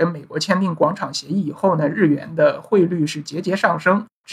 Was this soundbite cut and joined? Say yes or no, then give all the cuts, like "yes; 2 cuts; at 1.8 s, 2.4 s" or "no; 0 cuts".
no; 0 cuts